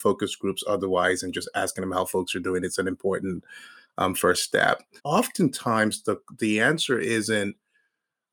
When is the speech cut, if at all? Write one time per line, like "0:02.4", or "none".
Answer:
0:05.0